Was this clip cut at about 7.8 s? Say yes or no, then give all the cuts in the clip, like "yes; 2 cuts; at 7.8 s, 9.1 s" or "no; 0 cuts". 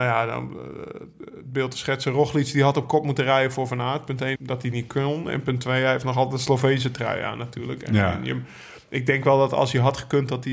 no; 1 cut; at 4.4 s